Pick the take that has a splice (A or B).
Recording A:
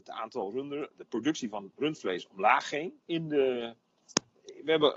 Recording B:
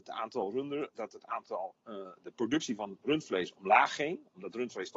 A